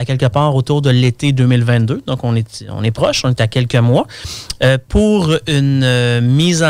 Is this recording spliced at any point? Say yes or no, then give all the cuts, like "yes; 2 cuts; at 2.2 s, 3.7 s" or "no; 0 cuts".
no; 0 cuts